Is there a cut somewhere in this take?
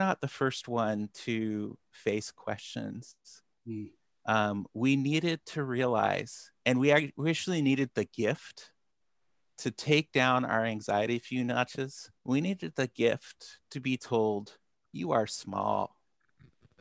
yes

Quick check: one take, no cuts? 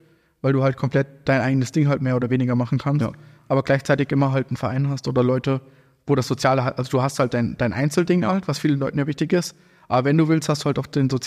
yes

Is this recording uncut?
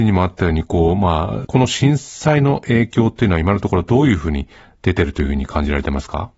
no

